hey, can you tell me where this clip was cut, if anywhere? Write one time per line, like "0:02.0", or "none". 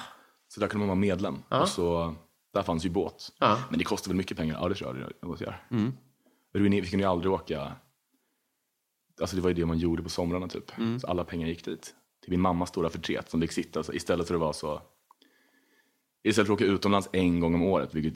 none